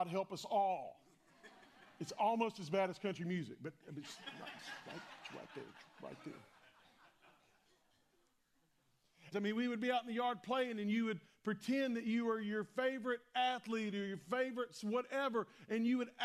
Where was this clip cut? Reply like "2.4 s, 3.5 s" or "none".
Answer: 9.3 s